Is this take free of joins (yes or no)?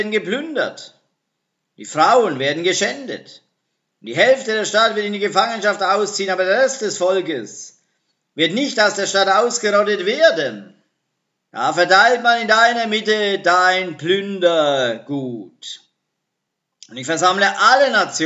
no